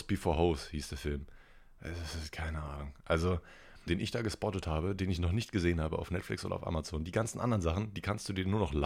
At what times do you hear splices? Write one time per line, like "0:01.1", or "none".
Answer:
0:03.9